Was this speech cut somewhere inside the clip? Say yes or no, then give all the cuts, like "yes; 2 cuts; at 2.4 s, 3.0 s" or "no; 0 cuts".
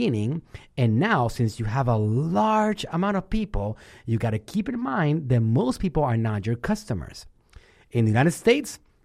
no; 0 cuts